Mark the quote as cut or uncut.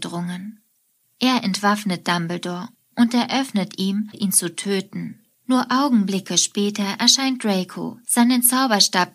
cut